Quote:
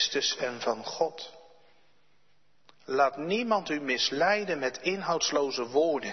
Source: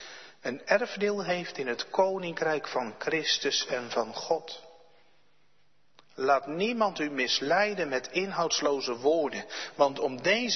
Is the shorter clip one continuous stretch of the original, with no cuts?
yes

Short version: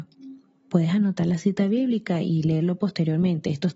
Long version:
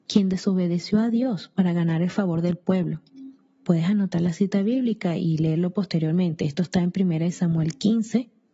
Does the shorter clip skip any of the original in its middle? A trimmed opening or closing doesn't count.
no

